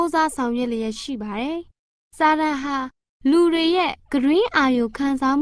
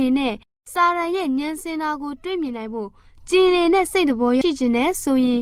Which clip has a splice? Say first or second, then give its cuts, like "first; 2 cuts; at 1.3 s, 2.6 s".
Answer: second; 1 cut; at 4.4 s